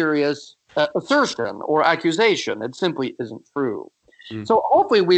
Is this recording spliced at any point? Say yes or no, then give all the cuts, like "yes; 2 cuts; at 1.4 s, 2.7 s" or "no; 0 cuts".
no; 0 cuts